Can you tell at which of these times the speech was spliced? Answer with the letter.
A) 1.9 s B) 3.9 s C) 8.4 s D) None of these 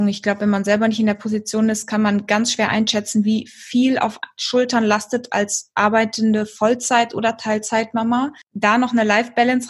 C